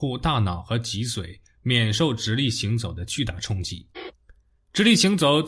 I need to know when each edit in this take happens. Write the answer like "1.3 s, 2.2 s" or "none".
3.9 s